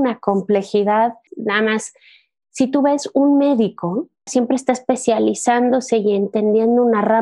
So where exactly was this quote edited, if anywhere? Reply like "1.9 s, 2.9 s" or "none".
1.3 s, 4.3 s